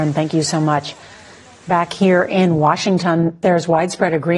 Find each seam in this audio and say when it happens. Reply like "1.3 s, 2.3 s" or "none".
none